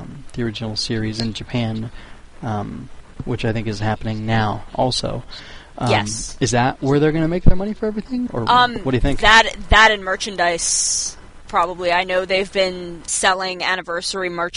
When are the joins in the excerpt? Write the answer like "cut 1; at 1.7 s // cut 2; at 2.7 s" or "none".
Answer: cut 1; at 8.3 s // cut 2; at 13.1 s